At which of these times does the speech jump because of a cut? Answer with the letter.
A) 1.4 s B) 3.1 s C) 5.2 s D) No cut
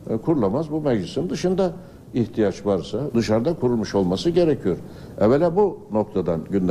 B